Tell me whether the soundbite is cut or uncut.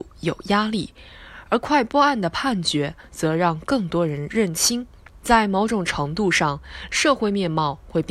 cut